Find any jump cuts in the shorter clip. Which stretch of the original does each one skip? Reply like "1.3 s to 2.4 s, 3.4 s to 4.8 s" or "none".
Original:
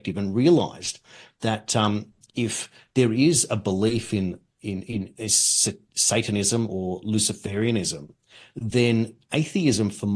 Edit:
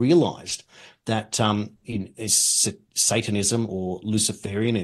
2.2 s to 4.8 s

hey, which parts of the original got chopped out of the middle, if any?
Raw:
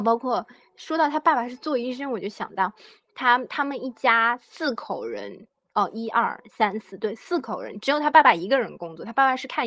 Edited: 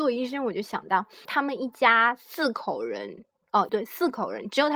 2.9 s to 3.5 s, 5.9 s to 7.0 s

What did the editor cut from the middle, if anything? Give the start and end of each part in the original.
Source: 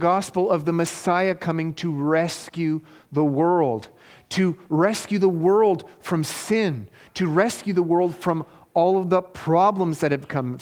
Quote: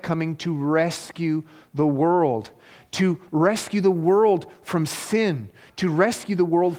none

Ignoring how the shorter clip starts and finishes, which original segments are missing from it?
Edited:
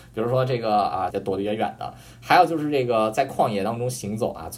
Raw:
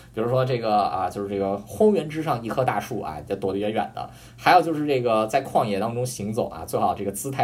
1.1 s to 3.3 s

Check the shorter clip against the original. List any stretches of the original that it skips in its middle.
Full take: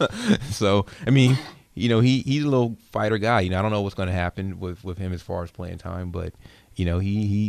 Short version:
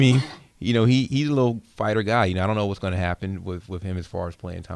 none

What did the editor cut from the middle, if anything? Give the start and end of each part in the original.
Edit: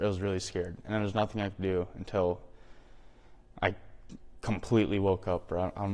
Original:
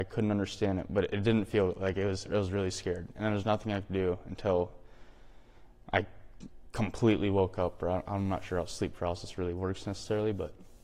none

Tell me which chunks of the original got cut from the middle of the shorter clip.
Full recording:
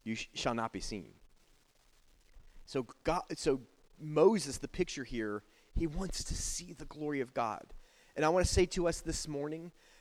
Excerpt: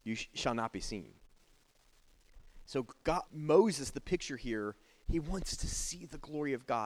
3.3 s to 3.9 s

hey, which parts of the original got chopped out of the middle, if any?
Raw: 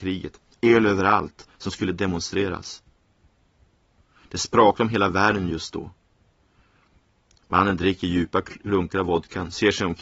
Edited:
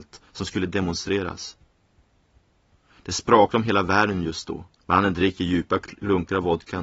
6.0 s to 7.4 s

